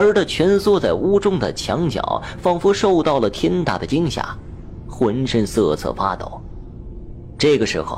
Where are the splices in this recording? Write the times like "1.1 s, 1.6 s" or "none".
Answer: none